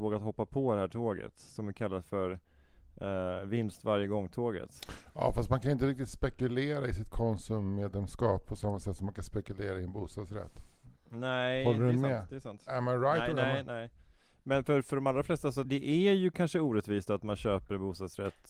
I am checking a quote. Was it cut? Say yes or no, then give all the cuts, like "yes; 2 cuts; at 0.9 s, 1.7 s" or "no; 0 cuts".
yes; 1 cut; at 15.6 s